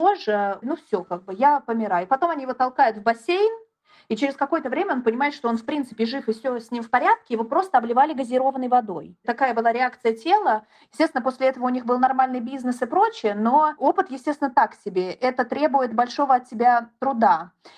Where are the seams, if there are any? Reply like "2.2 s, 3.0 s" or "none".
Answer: none